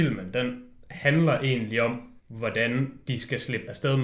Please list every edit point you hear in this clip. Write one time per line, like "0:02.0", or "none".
0:02.2